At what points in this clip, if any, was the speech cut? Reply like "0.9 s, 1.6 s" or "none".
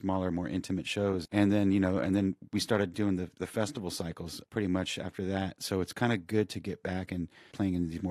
none